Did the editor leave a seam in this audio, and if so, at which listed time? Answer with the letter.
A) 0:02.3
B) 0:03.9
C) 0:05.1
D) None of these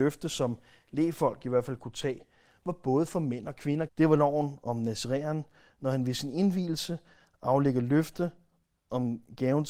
B